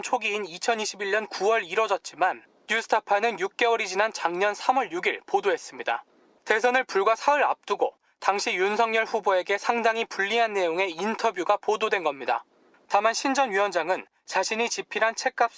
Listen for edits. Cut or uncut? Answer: cut